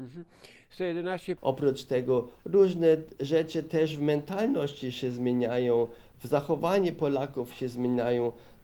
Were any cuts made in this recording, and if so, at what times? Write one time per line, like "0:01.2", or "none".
0:01.4